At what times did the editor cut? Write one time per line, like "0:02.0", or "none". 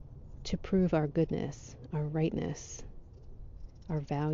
none